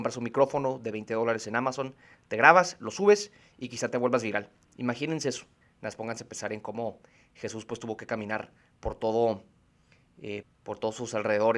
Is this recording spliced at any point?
yes; 2 cuts; at 5.6 s, 10.4 s

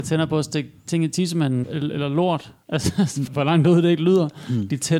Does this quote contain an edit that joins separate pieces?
yes; 2 cuts; at 1.6 s, 3.3 s

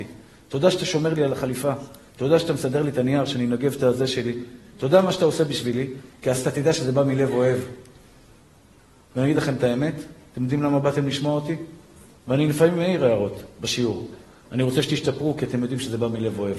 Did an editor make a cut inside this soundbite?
yes; 1 cut; at 6.1 s

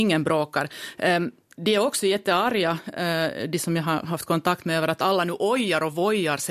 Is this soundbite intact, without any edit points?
yes; 0 cuts

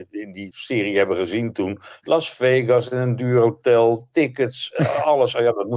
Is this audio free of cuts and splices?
yes; 0 cuts

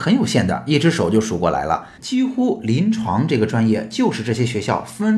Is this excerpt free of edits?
no; 1 cut; at 2.0 s

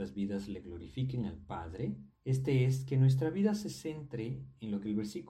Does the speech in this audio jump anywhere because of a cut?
yes; 1 cut; at 2.1 s

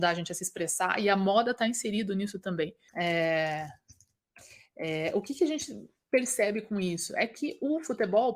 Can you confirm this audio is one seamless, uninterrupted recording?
no; 1 cut; at 2.9 s

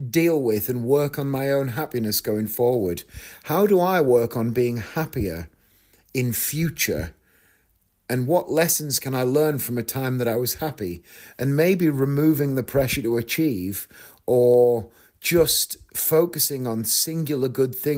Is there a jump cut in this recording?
no; 0 cuts

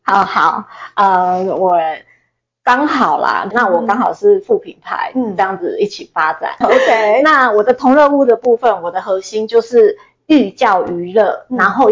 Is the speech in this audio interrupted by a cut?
yes; 2 cuts; at 3.5 s, 6.6 s

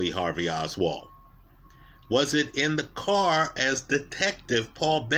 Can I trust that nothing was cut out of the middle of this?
yes; 0 cuts

